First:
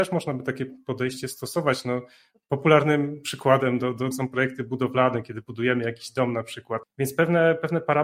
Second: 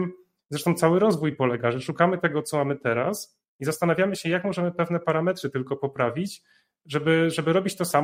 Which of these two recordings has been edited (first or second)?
first